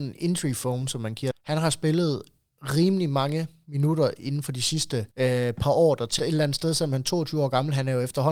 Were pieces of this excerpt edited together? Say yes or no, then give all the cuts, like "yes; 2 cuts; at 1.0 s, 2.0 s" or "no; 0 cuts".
yes; 3 cuts; at 1.3 s, 5.1 s, 6.2 s